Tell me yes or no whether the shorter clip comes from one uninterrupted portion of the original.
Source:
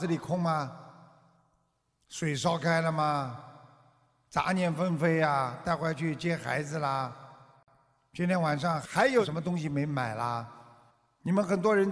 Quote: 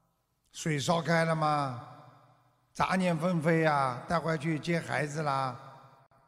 yes